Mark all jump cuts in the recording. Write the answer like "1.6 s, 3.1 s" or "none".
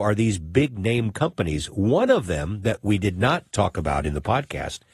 none